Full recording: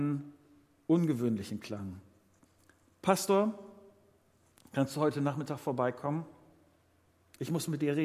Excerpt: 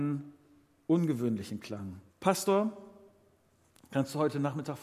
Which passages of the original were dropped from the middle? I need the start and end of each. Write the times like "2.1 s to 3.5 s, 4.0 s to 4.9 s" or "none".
2.1 s to 2.9 s